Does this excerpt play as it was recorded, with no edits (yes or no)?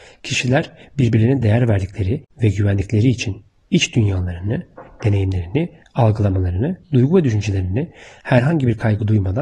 yes